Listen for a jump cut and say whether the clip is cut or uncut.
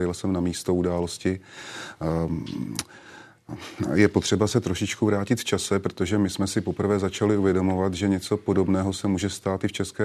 uncut